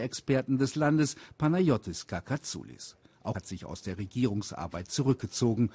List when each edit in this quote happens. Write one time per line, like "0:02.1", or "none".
0:03.3